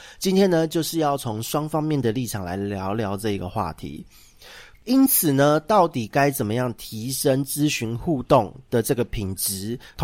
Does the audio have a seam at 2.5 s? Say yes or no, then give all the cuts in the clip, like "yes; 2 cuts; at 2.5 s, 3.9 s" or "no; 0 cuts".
no; 1 cut; at 4.7 s